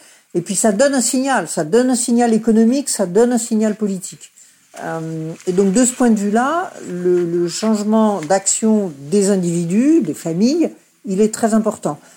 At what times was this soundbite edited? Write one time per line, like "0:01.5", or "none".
none

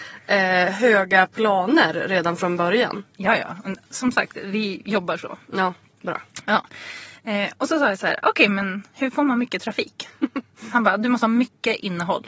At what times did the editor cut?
0:03.9

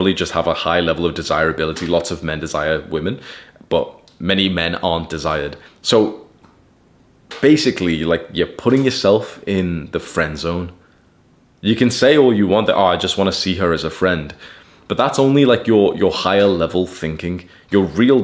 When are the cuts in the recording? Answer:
0:05.7

